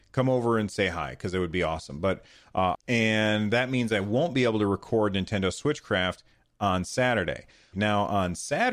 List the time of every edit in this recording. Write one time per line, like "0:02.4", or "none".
0:02.7
0:07.7